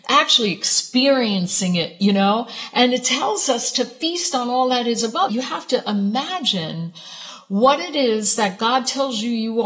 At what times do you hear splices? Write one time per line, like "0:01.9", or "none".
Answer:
0:05.3